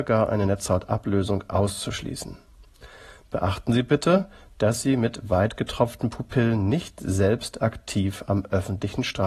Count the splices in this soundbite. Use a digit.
0